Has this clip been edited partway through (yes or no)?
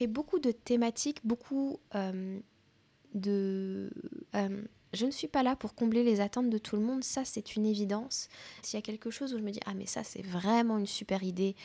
yes